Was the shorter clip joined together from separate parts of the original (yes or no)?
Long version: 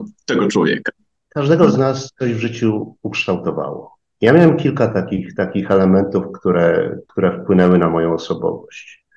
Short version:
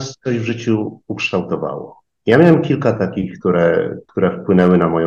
yes